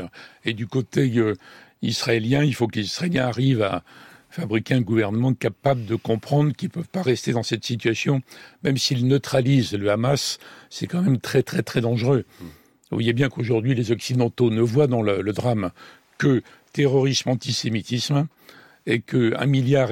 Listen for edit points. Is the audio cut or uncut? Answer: uncut